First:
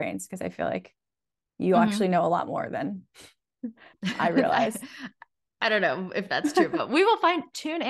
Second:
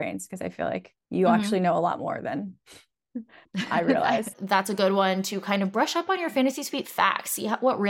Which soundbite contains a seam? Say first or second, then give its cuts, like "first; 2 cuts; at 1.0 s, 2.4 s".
second; 2 cuts; at 1.0 s, 4.3 s